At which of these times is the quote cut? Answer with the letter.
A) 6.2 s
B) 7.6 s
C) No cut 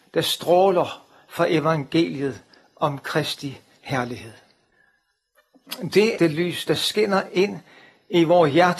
A